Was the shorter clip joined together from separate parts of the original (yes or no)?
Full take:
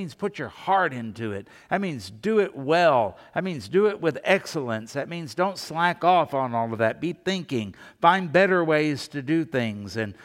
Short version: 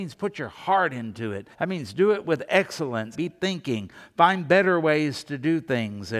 yes